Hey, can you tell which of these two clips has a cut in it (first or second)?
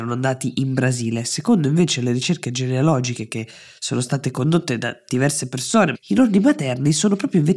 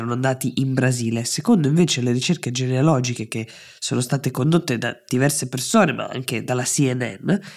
first